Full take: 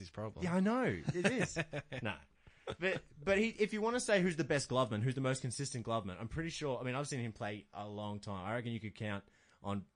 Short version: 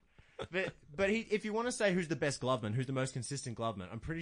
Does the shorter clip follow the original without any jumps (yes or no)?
yes